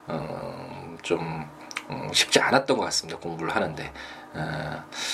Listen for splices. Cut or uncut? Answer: uncut